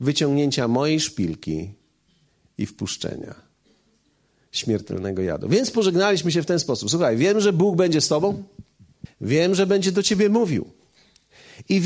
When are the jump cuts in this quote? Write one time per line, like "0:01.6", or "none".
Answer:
0:09.0